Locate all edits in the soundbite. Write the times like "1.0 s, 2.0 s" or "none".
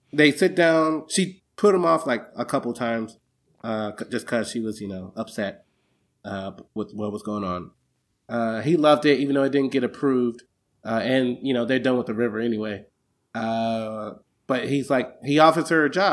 8.1 s